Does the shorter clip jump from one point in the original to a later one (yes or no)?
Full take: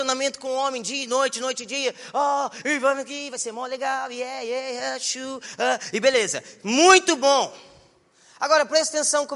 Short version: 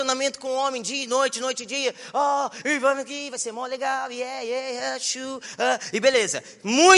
no